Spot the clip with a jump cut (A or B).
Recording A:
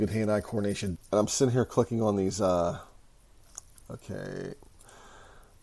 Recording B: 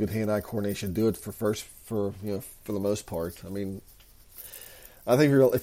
A